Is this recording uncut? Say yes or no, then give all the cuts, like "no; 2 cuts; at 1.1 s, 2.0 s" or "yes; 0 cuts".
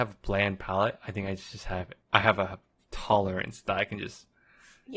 no; 1 cut; at 2.0 s